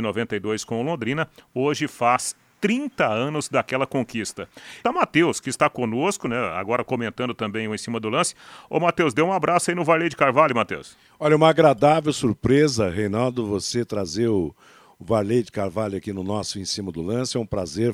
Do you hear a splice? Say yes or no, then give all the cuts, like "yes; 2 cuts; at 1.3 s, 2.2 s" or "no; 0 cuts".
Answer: yes; 1 cut; at 4.8 s